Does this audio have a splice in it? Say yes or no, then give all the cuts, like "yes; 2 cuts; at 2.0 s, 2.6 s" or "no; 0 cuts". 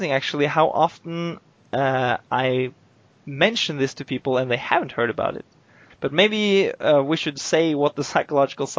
yes; 1 cut; at 5.9 s